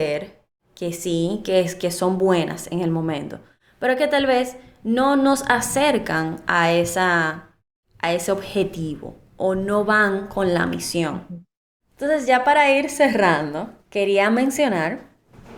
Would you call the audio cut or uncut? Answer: cut